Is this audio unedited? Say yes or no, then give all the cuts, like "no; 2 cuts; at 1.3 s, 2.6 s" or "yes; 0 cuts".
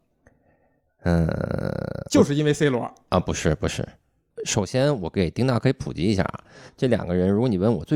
yes; 0 cuts